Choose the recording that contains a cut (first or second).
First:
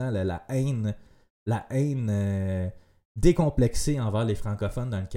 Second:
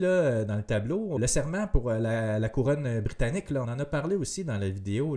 second